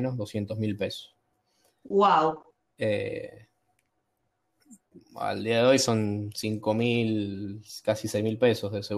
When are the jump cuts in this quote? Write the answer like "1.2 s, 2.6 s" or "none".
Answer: 1.8 s

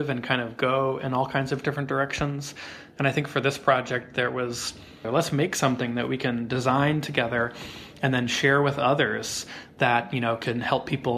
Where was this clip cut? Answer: 5.0 s

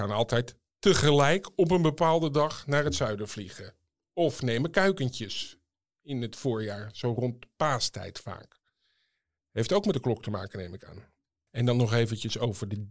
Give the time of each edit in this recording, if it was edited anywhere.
11.5 s

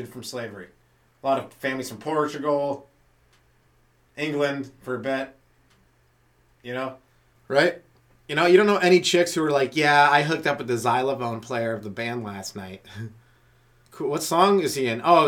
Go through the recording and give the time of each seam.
7.4 s, 13.9 s

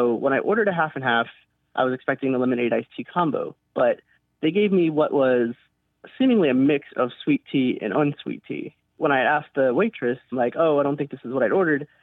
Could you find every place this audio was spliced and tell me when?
10.3 s

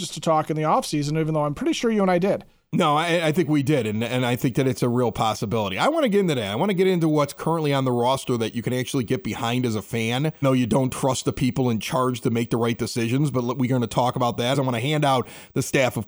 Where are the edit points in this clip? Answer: 10.4 s, 14.5 s

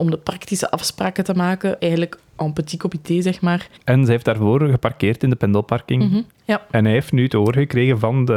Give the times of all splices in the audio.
1.8 s, 3.8 s, 6.3 s

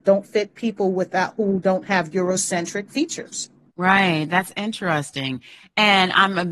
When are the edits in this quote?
none

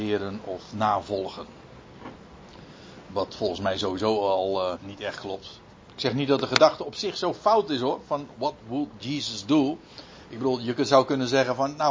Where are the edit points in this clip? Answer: 4.8 s

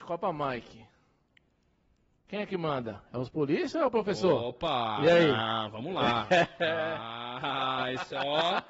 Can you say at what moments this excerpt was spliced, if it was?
none

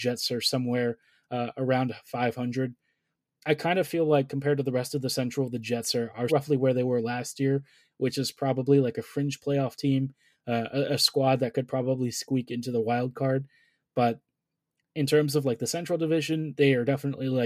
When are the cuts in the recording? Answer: 6.3 s

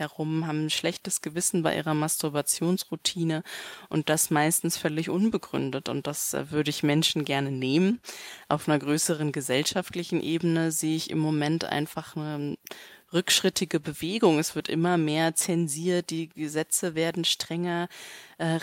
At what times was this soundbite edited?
none

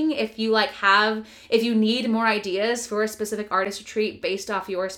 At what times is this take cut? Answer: none

